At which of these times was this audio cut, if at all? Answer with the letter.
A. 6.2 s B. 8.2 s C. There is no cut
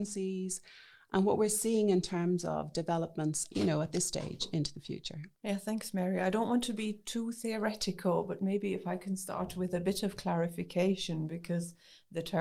C